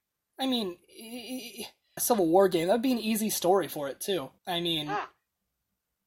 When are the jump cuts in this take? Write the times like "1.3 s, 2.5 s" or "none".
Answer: 2.0 s, 4.4 s